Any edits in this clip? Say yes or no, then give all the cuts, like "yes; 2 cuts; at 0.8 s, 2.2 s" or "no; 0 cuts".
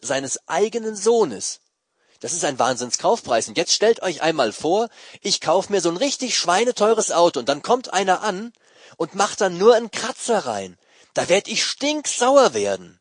no; 0 cuts